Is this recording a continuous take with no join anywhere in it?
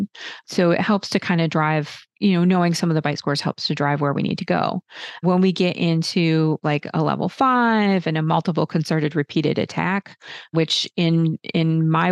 no; 1 cut; at 2.1 s

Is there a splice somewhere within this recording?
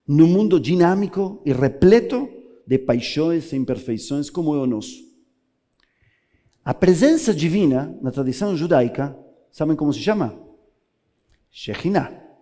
no; 0 cuts

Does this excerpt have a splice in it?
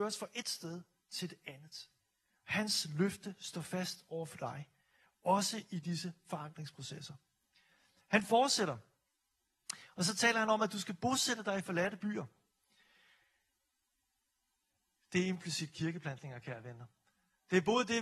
no; 0 cuts

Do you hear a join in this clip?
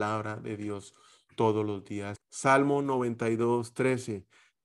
yes; 1 cut; at 2.2 s

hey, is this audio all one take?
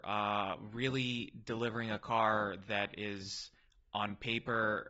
yes; 0 cuts

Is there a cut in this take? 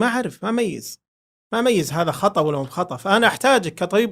no; 0 cuts

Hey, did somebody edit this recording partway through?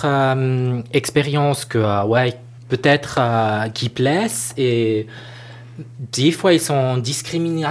no; 0 cuts

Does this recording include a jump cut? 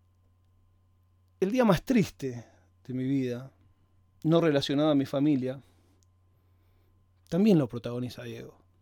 no; 0 cuts

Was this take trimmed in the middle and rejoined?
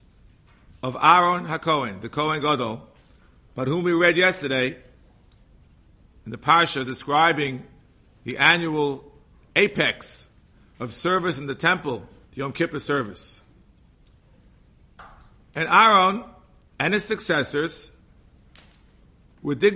yes; 1 cut; at 12.3 s

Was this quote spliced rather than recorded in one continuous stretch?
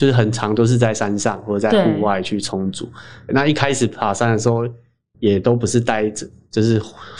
yes; 1 cut; at 3.3 s

